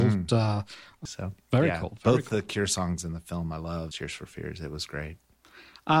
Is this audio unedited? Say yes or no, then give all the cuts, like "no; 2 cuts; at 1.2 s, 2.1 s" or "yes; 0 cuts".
no; 2 cuts; at 1.1 s, 3.9 s